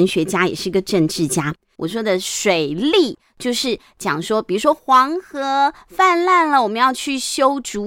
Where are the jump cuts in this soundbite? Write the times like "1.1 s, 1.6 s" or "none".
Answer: 1.7 s

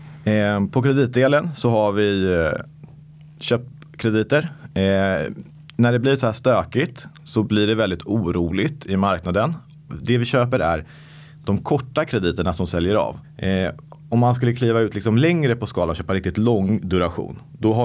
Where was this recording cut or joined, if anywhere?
9.9 s, 13.2 s

